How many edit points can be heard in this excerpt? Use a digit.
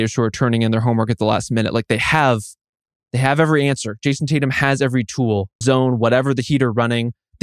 1